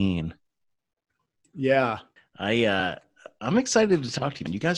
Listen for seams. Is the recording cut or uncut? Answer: cut